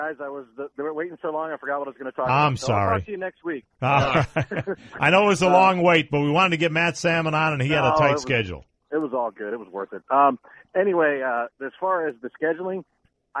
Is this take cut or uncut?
uncut